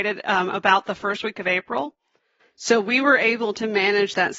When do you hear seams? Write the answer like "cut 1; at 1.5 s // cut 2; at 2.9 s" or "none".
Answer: cut 1; at 2.4 s